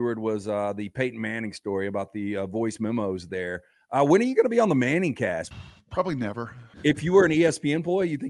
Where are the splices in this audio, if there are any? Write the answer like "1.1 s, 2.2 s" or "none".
5.5 s, 6.7 s